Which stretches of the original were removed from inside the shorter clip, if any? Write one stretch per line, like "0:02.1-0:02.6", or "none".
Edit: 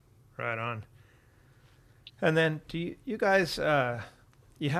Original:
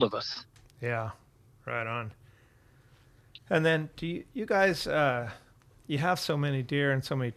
none